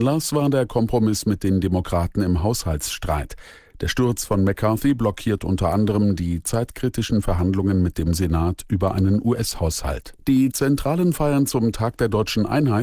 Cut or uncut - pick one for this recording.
cut